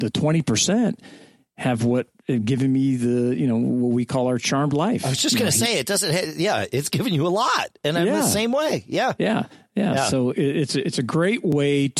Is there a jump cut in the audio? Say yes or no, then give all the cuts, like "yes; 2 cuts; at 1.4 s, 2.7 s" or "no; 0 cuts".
no; 0 cuts